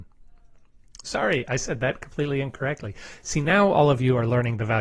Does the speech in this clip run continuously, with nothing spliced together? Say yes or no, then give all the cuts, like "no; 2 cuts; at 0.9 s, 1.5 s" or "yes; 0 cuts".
yes; 0 cuts